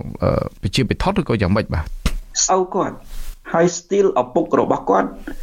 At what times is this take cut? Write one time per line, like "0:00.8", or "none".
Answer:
0:02.5